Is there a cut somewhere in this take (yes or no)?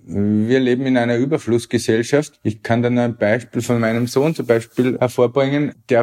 no